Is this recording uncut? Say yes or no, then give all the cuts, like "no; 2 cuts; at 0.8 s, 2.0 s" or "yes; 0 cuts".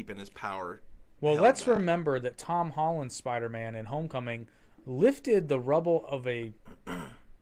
yes; 0 cuts